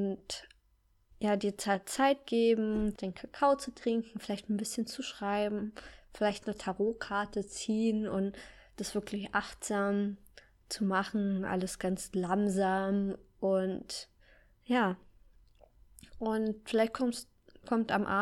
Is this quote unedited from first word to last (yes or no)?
no